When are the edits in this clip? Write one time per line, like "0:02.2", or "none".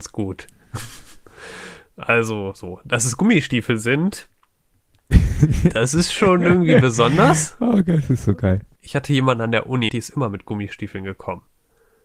0:05.7
0:08.8
0:09.9

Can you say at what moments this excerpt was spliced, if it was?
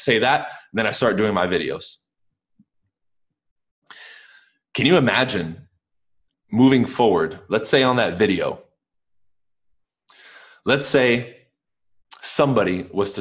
none

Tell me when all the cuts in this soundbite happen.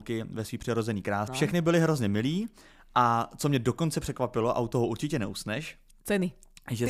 0:01.3

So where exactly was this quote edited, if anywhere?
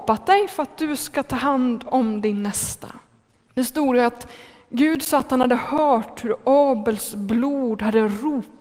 0:03.5

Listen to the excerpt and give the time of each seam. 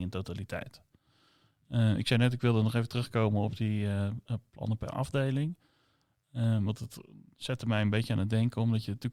none

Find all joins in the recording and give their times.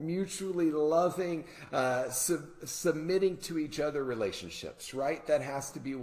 none

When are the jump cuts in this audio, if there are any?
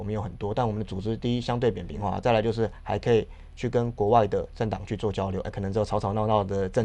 0:02.2
0:05.4

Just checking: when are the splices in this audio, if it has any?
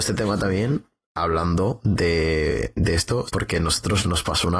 0:03.3

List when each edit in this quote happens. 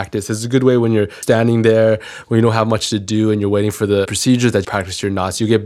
0:01.2
0:04.6

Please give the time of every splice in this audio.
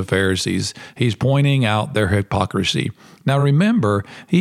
none

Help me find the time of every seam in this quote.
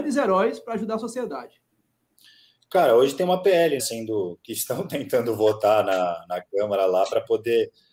0:03.8

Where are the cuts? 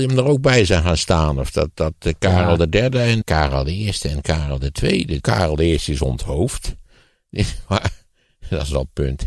0:03.2
0:05.2

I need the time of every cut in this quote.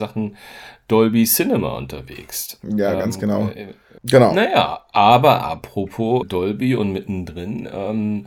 0:04.0
0:06.2

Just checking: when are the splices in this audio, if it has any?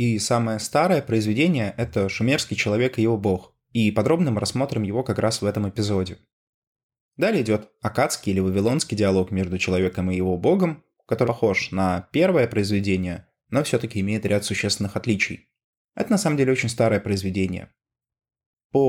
0:11.2
0:15.7

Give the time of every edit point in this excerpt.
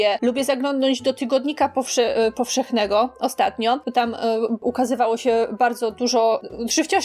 none

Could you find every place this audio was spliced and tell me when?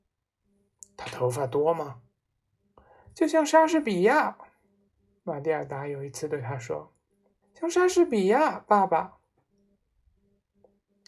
0:03.0
0:07.4

